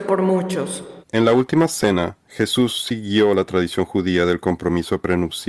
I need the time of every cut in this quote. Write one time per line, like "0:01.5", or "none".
0:01.0